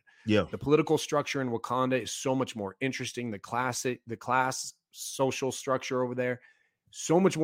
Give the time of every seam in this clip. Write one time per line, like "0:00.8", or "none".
none